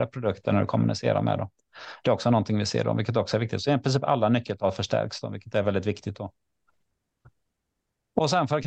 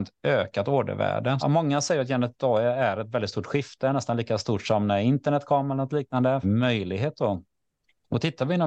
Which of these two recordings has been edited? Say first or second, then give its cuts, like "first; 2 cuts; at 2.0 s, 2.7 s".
second; 2 cuts; at 1.4 s, 6.4 s